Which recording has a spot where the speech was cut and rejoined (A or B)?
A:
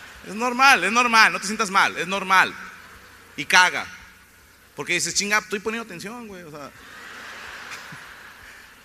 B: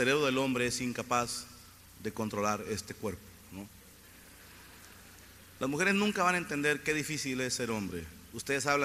A